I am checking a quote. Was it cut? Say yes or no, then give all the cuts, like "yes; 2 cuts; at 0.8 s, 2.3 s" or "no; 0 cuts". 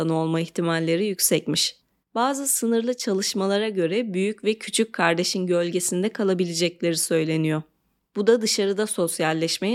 no; 0 cuts